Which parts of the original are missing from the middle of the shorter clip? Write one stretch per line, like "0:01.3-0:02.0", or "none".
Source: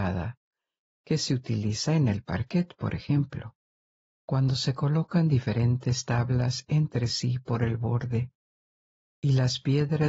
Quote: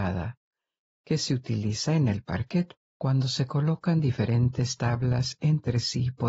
0:02.8-0:04.0